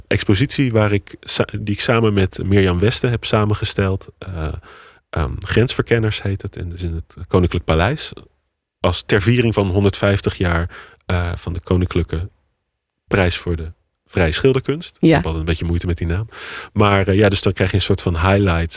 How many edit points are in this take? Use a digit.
0